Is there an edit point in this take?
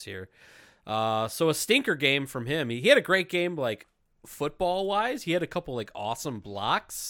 no; 0 cuts

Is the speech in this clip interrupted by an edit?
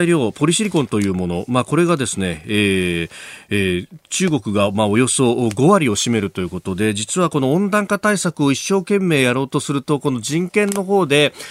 no; 0 cuts

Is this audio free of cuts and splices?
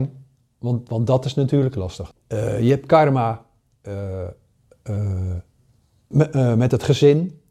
no; 2 cuts; at 2.1 s, 6.1 s

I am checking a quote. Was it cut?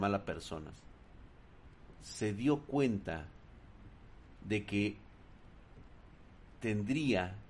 no; 0 cuts

